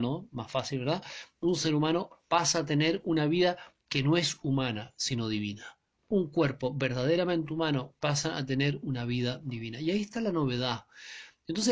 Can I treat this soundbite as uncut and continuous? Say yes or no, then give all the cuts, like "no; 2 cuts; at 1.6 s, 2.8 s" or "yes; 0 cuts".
no; 1 cut; at 7.9 s